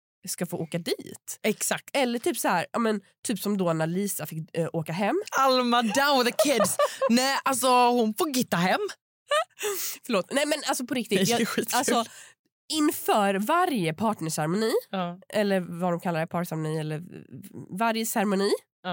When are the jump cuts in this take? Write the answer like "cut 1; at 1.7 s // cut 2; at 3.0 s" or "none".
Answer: cut 1; at 5.3 s